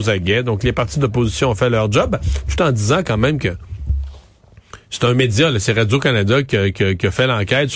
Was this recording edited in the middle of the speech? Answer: no; 0 cuts

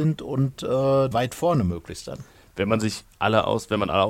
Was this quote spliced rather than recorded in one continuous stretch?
yes; 1 cut; at 1.1 s

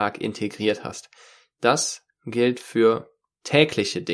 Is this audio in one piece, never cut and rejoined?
yes; 0 cuts

